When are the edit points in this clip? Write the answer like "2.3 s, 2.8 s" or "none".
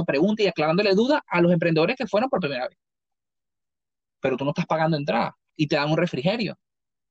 none

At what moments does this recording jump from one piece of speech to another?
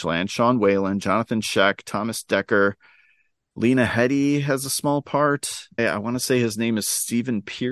5.8 s

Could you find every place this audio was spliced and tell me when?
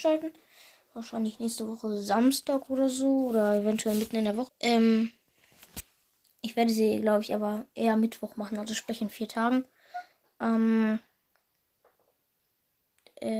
4.5 s

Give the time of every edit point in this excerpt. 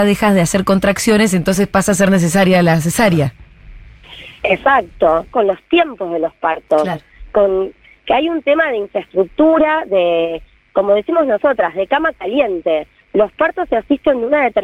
5.3 s

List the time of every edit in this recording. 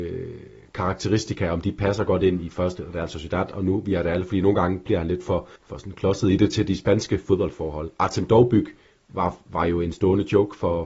5.6 s

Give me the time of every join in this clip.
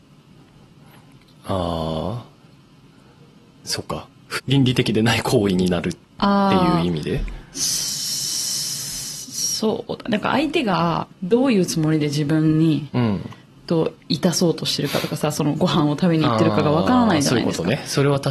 4.4 s, 11.1 s

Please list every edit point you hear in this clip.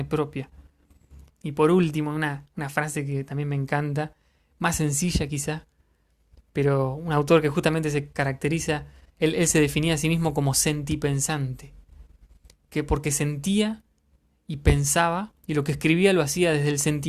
1.3 s

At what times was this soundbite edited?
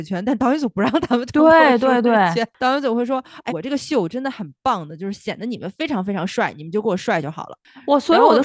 3.5 s

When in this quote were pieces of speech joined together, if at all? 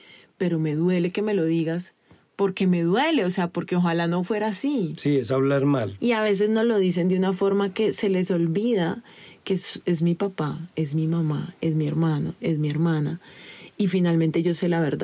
6.0 s

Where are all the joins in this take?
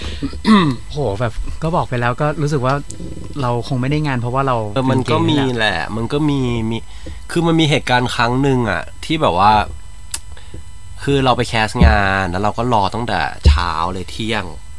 4.8 s

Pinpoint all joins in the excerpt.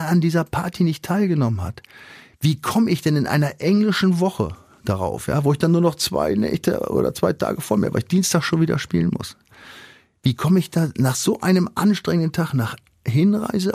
none

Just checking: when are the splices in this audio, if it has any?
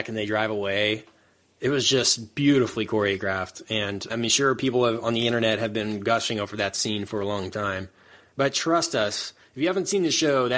4.1 s

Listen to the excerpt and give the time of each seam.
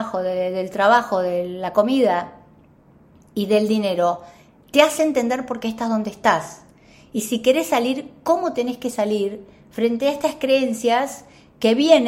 none

